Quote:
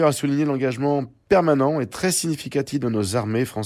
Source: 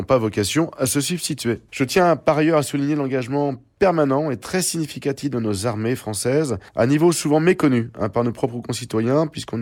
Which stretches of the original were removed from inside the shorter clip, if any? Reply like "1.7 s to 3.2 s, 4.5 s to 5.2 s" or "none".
none